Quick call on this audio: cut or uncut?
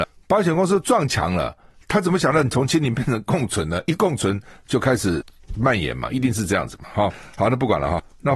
uncut